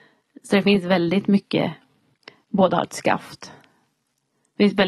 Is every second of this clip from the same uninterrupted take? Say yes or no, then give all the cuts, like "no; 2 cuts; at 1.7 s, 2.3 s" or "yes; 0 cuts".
yes; 0 cuts